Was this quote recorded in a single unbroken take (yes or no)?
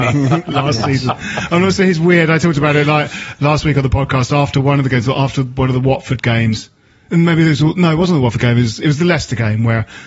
yes